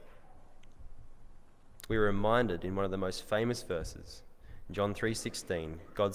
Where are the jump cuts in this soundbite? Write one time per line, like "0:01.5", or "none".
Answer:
0:01.9